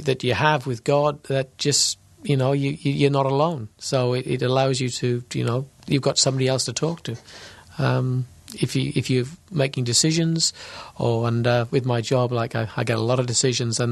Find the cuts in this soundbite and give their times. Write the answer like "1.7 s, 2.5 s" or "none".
none